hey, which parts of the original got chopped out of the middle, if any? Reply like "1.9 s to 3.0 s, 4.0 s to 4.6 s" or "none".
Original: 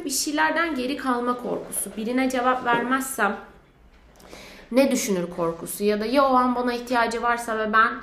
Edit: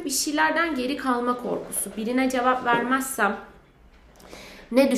none